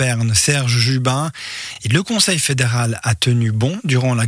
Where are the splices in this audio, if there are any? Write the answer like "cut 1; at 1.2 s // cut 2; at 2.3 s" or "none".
none